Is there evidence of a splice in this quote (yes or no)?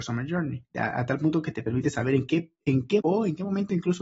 yes